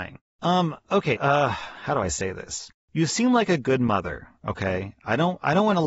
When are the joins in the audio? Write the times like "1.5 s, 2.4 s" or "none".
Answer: 1.2 s